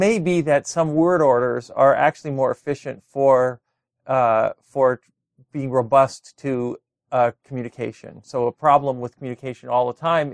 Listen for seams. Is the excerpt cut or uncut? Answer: uncut